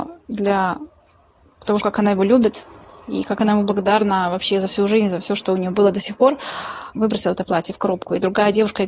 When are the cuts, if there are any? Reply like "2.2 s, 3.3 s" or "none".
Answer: 1.8 s, 6.9 s